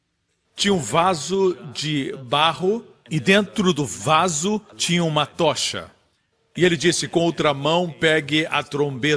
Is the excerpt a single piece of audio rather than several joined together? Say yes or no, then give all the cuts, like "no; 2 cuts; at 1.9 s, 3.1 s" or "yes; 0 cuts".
yes; 0 cuts